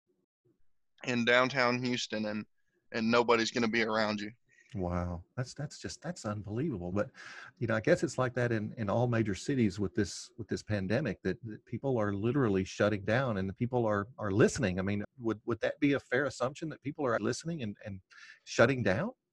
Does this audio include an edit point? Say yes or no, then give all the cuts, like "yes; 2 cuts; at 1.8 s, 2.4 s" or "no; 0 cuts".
yes; 3 cuts; at 6.9 s, 15.0 s, 17.2 s